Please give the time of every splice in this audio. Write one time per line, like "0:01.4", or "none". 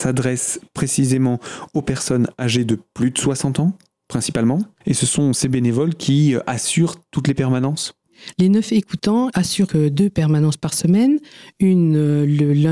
0:04.8
0:09.7

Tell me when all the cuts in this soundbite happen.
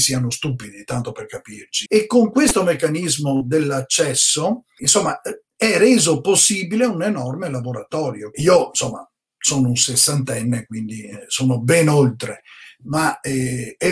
0:01.9
0:04.8
0:08.3

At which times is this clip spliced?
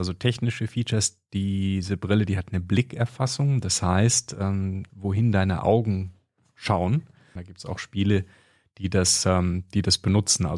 0:04.9
0:07.4

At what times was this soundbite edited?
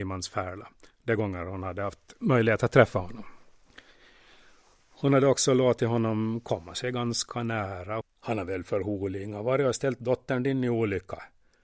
0:08.0

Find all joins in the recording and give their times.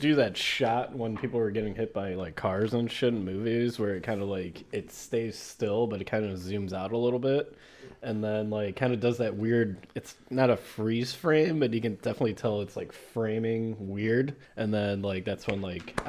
0:14.4

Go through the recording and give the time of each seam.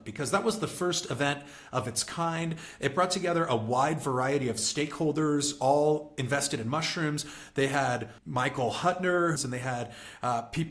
0:08.2
0:09.4

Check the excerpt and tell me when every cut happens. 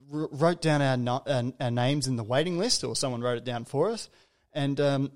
none

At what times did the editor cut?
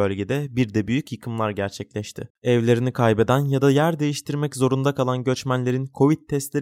none

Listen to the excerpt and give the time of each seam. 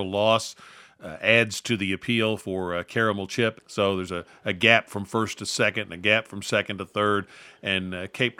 0:03.6

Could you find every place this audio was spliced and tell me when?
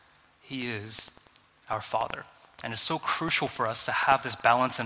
none

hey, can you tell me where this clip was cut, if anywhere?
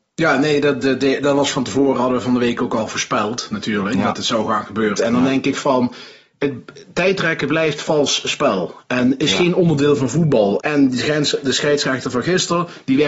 0:04.9
0:10.6

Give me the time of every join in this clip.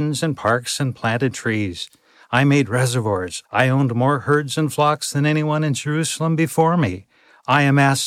0:03.4

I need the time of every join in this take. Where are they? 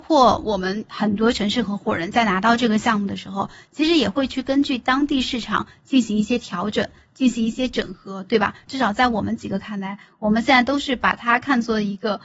0:08.7

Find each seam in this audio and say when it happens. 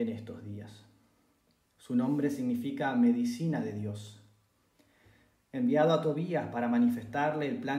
0:01.7

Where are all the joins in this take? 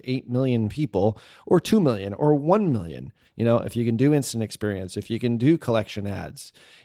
0:03.2

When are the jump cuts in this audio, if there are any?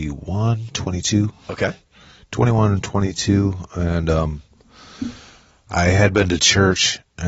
none

